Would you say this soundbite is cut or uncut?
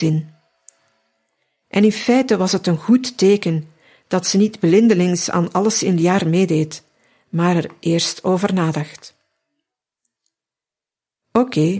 uncut